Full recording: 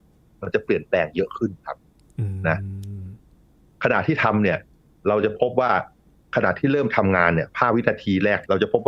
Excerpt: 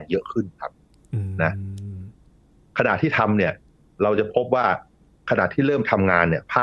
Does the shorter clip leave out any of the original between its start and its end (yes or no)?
no